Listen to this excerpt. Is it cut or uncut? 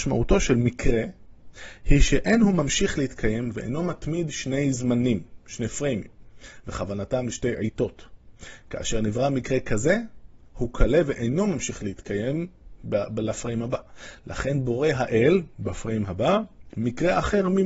uncut